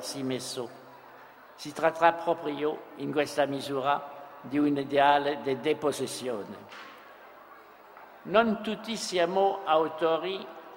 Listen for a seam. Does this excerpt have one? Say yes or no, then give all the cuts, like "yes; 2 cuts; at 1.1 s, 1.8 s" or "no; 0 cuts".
no; 0 cuts